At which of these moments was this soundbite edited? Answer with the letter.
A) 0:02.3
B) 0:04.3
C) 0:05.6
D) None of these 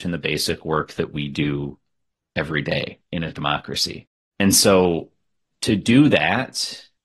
B